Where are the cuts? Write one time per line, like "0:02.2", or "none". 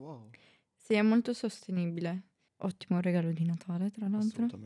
0:02.5

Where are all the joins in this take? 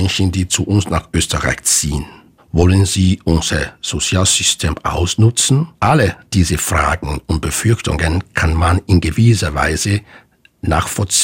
0:02.4
0:05.7

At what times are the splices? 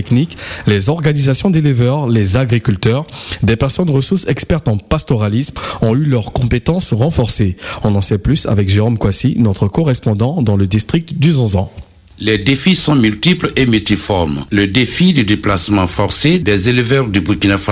none

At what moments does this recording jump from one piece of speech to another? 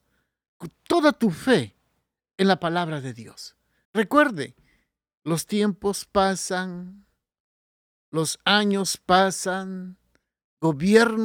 0:03.9

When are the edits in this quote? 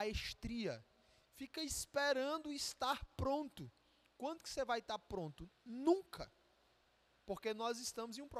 0:01.3

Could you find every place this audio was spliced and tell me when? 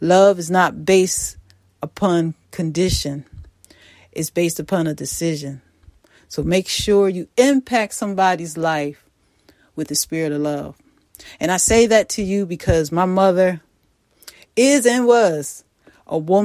none

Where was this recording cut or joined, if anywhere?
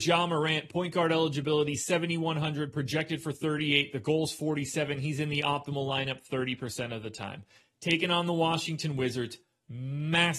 none

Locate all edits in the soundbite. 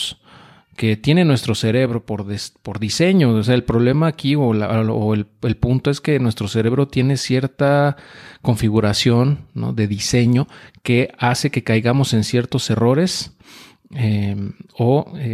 none

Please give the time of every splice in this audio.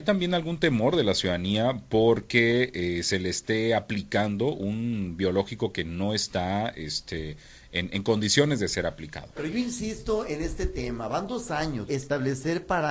0:11.9

